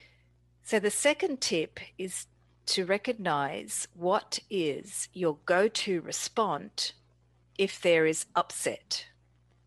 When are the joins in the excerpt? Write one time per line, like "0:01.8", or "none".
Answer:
none